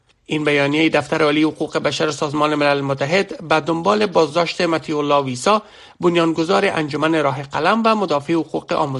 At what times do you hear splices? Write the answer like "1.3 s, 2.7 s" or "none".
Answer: none